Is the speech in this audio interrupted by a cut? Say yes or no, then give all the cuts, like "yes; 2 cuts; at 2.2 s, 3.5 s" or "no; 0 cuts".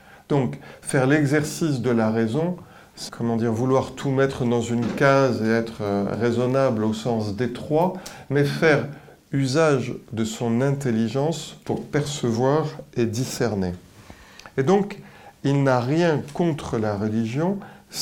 yes; 1 cut; at 3.1 s